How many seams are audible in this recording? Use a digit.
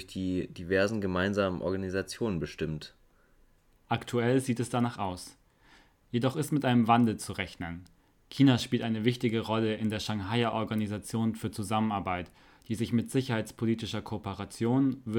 0